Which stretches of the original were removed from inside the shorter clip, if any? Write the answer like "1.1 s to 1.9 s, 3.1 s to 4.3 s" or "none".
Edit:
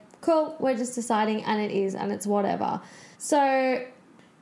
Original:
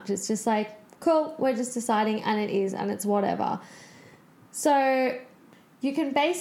3.9 s to 4.5 s